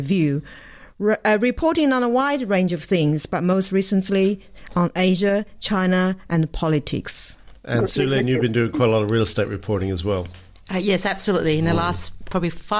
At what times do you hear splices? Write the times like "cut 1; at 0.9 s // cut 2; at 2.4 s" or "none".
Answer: none